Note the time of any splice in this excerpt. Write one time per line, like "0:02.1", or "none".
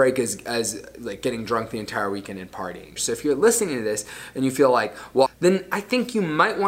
0:03.0
0:05.3